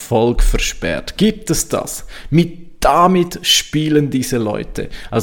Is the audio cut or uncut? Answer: uncut